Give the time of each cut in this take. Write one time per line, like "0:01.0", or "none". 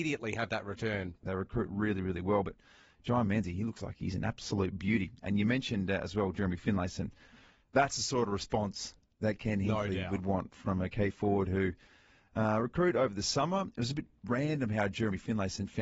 0:01.2